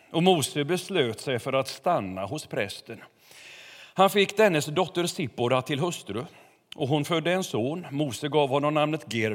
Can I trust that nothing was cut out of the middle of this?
yes; 0 cuts

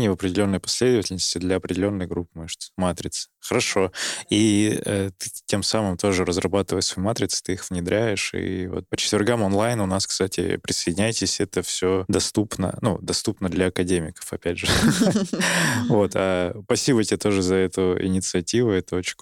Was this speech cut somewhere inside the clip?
no; 0 cuts

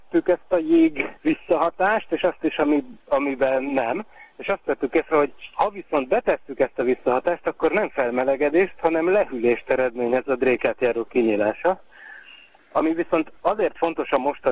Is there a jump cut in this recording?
yes; 1 cut; at 1.2 s

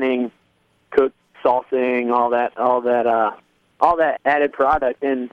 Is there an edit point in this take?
yes; 1 cut; at 4.2 s

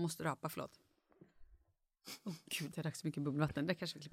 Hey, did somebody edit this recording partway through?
yes; 1 cut; at 2.7 s

